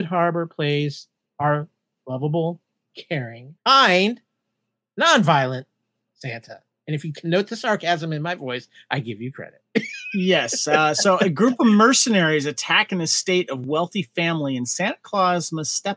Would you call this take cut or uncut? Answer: cut